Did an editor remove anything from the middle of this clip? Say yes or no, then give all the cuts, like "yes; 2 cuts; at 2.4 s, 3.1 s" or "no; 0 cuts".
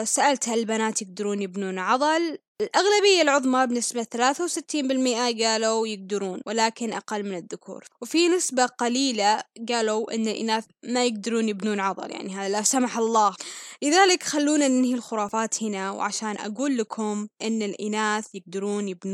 no; 0 cuts